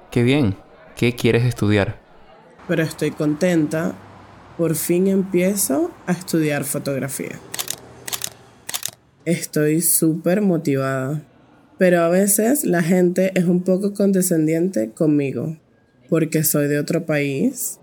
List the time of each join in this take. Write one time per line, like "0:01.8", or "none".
0:02.6
0:09.2